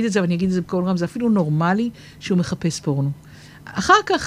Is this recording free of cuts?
yes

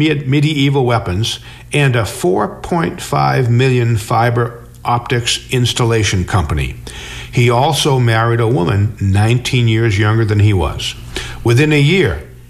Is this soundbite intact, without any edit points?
yes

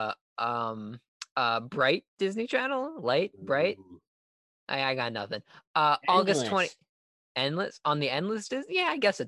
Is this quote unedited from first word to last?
yes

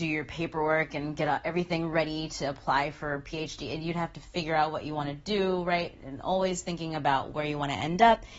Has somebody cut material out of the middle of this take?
no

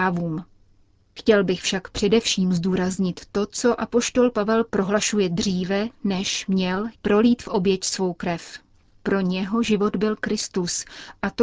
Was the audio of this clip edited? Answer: yes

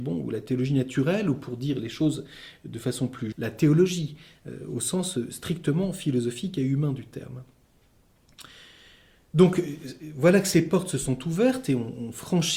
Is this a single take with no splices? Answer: no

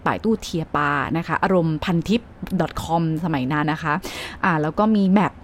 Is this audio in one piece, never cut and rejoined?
no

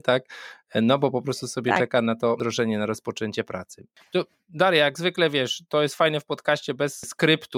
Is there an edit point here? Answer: no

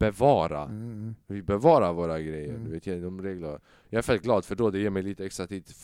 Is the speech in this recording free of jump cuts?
yes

